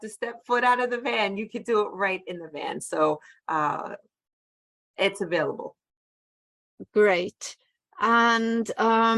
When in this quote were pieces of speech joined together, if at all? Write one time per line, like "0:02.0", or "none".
none